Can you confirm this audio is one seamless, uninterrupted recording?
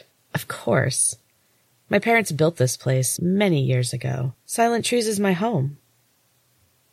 no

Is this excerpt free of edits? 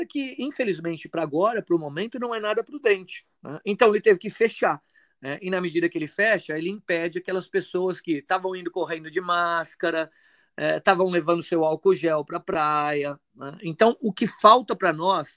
yes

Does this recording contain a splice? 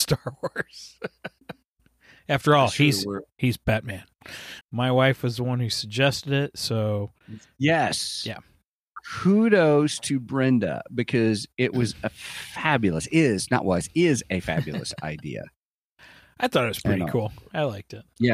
yes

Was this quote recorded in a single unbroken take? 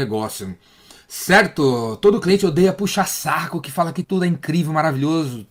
no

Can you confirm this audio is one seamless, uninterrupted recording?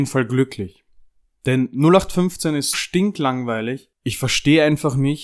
no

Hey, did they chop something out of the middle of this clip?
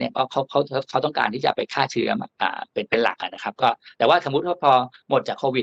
no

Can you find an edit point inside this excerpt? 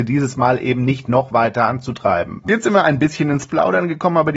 yes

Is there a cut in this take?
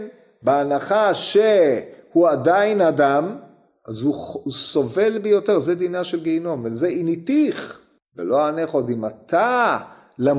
no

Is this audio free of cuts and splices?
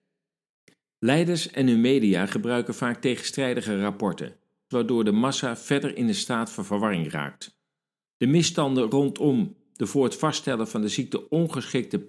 no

